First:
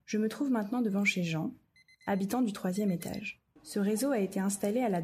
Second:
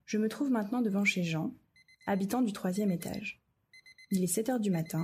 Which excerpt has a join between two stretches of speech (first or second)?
first